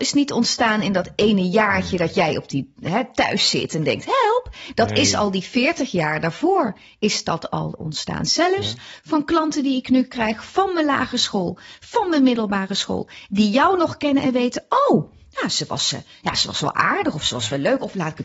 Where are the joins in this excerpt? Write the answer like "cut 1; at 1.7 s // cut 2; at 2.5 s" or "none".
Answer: none